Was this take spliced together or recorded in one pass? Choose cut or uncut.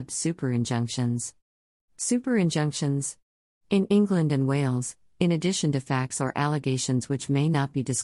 cut